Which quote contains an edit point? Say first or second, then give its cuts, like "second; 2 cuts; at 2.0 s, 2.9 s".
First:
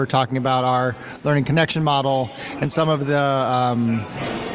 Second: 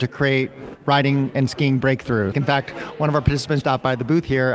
second; 2 cuts; at 2.3 s, 3.6 s